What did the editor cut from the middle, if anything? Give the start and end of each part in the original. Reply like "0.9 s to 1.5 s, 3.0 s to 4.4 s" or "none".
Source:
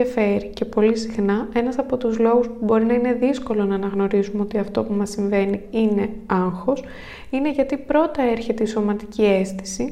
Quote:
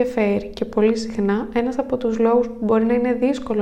none